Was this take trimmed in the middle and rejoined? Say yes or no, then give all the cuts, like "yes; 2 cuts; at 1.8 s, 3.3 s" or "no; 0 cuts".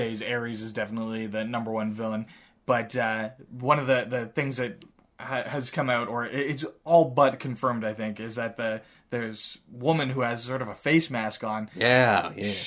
no; 0 cuts